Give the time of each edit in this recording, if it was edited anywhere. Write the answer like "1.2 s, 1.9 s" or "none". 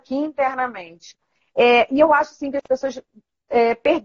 none

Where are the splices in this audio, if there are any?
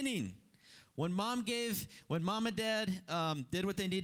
none

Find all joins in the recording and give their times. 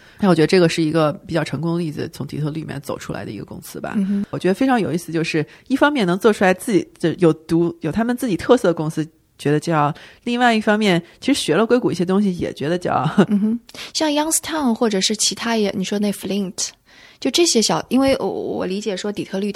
4.3 s, 13.3 s

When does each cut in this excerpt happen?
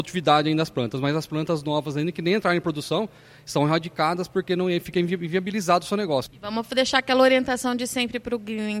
6.3 s

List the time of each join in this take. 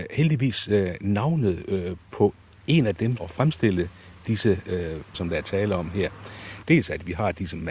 3.2 s, 5.1 s, 6.6 s

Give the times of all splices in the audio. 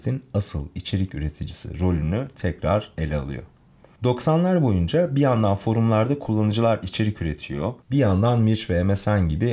4.0 s, 7.8 s

